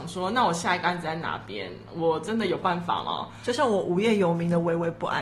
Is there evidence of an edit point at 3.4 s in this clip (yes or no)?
no